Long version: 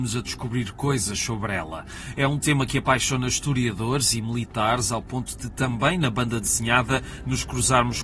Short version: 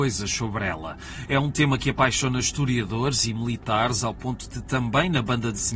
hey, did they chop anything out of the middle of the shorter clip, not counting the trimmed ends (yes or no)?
no